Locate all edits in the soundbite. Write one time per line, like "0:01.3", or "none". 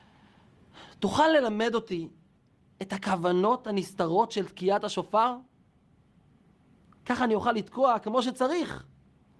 none